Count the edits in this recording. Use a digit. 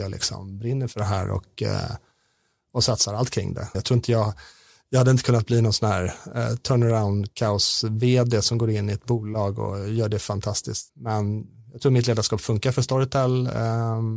2